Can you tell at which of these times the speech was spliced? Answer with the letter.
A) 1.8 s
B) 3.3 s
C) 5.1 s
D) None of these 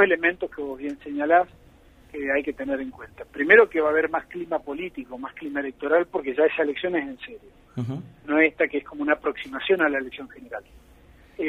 D